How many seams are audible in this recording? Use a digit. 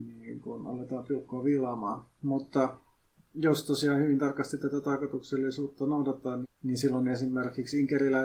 1